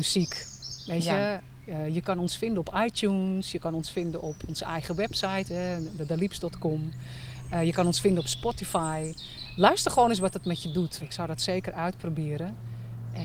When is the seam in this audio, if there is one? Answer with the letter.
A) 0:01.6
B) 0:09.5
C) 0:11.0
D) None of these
C